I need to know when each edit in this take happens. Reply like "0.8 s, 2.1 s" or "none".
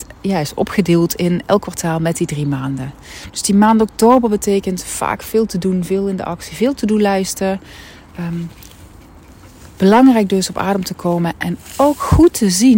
none